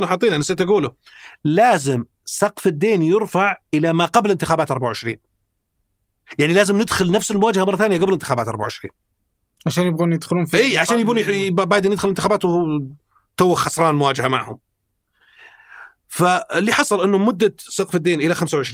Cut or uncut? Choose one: uncut